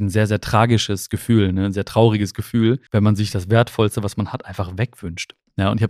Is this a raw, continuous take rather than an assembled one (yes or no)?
no